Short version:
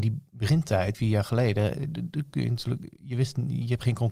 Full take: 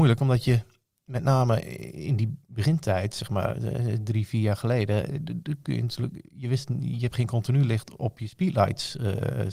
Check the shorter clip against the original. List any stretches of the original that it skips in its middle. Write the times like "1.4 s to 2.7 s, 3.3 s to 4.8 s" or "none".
3.1 s to 4.3 s